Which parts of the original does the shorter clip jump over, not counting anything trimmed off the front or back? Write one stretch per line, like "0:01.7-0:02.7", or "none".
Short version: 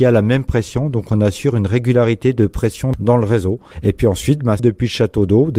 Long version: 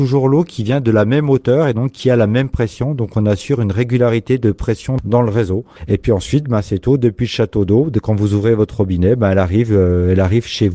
0:06.6-0:07.0